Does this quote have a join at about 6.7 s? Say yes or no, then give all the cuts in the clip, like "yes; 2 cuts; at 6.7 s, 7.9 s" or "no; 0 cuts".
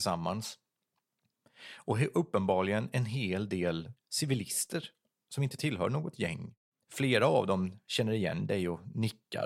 no; 0 cuts